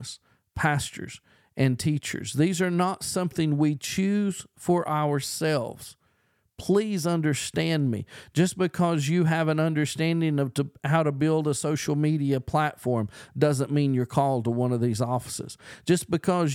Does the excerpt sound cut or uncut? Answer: uncut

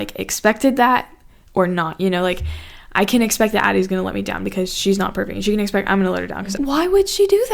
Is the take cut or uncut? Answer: cut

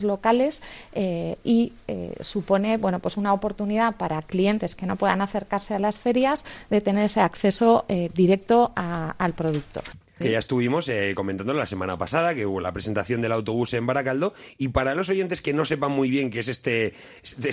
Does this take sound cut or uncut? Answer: cut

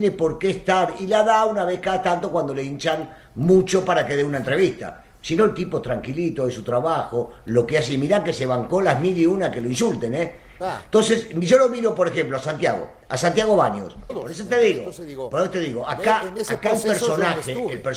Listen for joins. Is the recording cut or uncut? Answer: cut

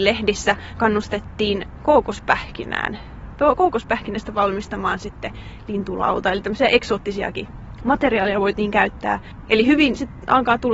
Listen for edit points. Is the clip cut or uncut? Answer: cut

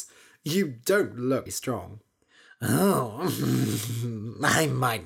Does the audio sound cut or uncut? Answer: cut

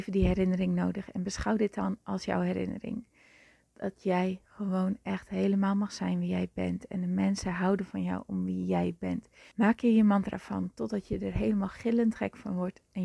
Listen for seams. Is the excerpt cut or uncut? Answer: cut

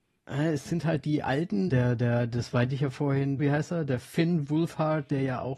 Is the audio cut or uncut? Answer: cut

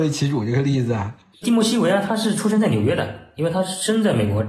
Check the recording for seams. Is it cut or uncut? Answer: cut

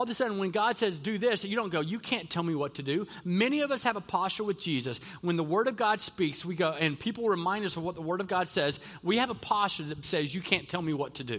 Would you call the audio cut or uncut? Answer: cut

